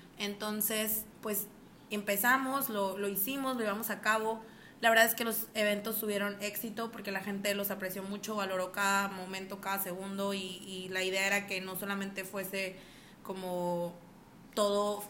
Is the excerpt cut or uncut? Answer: cut